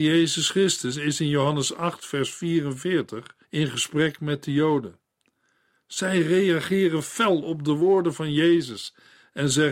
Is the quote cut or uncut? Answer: cut